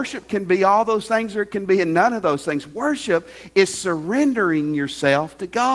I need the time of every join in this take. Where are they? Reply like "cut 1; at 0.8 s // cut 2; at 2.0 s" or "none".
none